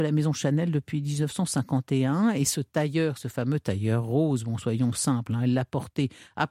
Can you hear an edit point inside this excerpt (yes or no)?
no